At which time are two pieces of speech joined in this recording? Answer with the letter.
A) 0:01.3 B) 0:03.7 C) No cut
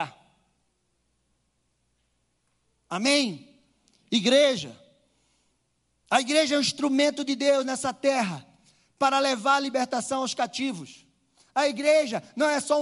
C